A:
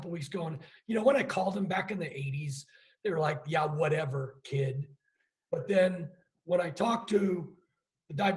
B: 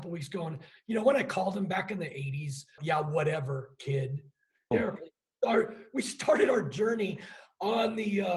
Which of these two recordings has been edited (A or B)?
B